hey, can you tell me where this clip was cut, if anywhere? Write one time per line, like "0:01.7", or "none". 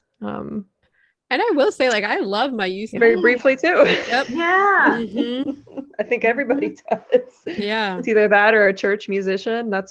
0:03.0